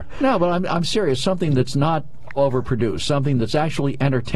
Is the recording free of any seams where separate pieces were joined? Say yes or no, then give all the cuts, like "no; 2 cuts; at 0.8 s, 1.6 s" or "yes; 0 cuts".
no; 1 cut; at 2.4 s